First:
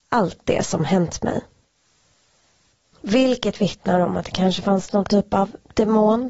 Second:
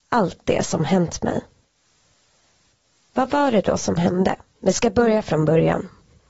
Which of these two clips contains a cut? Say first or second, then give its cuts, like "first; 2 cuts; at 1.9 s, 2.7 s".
first; 1 cut; at 2.9 s